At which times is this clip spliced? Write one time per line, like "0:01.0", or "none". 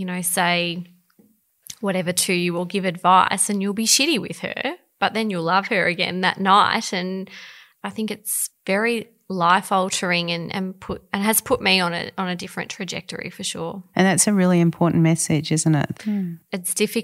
0:15.9